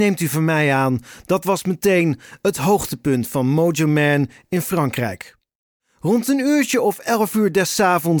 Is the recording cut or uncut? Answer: uncut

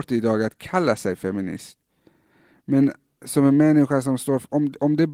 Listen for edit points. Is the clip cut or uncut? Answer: uncut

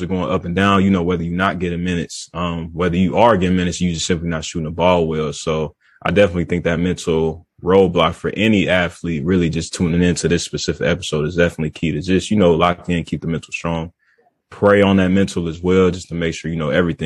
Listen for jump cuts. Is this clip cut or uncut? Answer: uncut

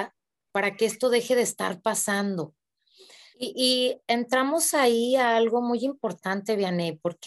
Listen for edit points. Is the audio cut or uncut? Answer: cut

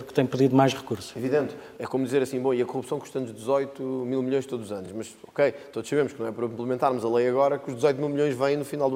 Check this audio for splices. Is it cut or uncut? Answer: uncut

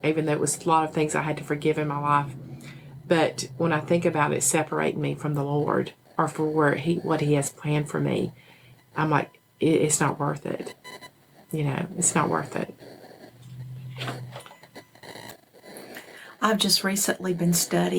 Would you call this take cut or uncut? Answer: uncut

